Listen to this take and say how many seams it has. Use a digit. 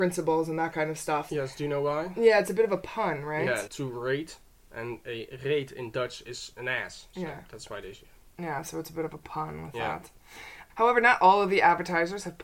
2